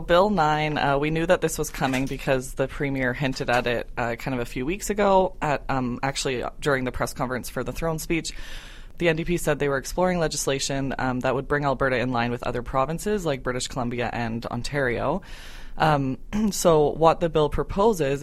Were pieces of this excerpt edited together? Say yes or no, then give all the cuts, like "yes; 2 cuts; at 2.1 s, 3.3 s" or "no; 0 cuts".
no; 0 cuts